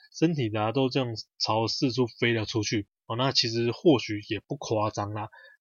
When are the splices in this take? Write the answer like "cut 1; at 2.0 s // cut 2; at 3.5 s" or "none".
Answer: none